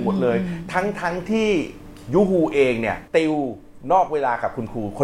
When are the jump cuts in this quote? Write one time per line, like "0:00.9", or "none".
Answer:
0:03.1